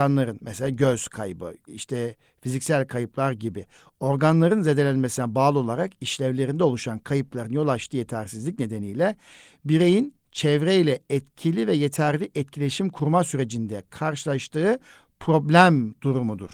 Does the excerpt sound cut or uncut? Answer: cut